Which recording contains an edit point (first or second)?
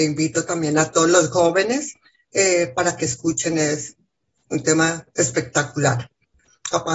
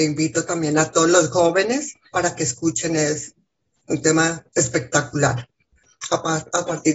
second